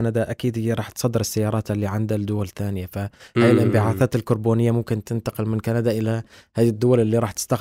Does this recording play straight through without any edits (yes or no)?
yes